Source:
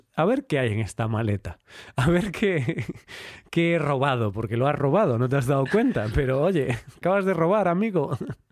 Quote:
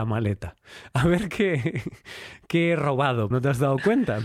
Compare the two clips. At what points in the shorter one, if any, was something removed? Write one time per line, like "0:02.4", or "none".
0:03.3